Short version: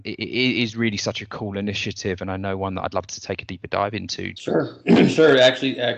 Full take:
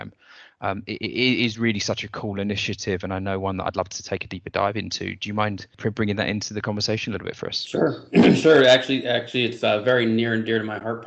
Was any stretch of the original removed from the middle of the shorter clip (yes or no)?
yes